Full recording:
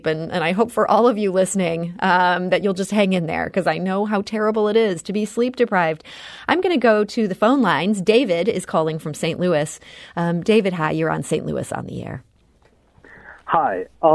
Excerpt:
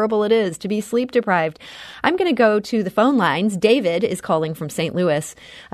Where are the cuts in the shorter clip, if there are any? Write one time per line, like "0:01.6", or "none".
none